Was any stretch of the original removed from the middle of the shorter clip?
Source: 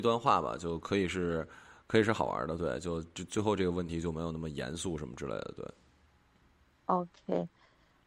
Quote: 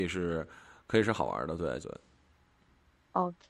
yes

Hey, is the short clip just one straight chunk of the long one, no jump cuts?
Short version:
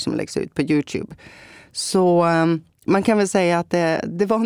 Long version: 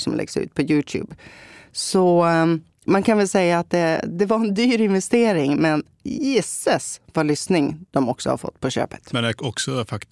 yes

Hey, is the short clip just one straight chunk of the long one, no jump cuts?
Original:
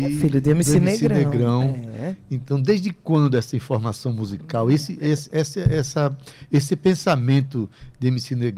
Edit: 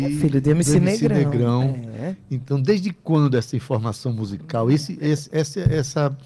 yes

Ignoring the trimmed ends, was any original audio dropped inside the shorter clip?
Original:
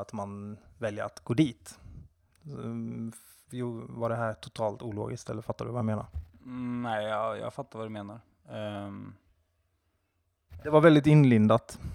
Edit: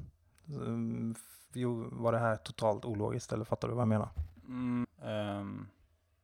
yes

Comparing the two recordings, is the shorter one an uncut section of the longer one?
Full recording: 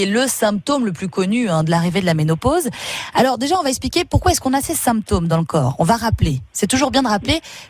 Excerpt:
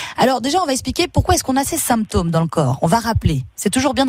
yes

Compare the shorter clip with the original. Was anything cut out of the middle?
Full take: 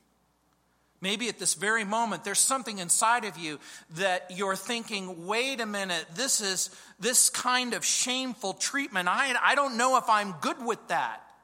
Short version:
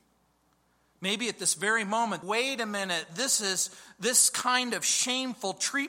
yes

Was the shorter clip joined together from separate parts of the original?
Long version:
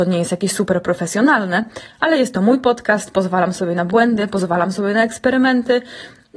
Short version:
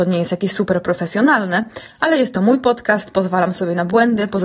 no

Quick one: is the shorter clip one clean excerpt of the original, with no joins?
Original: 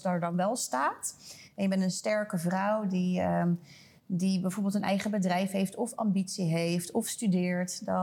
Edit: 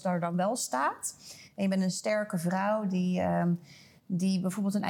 yes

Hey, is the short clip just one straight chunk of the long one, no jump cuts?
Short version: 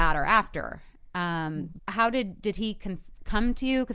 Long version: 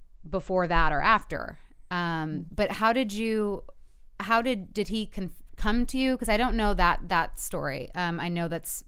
no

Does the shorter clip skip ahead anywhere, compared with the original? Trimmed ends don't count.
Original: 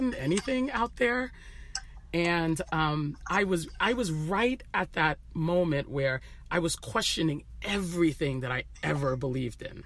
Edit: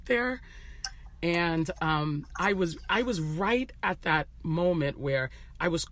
no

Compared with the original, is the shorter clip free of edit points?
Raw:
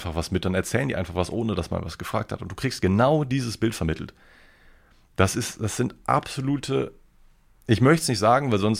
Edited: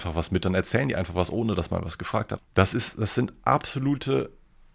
no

